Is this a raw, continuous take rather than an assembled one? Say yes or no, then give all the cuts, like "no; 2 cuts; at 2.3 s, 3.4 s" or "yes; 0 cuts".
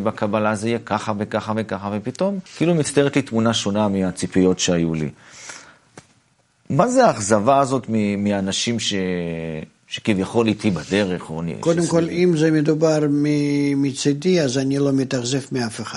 no; 1 cut; at 2.5 s